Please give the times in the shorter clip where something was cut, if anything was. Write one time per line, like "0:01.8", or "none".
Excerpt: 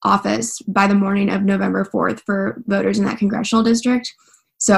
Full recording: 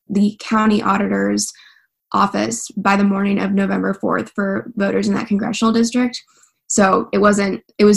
none